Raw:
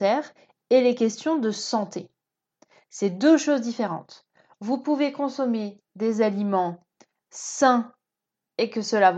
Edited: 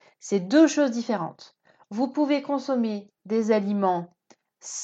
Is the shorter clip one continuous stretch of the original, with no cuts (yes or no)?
yes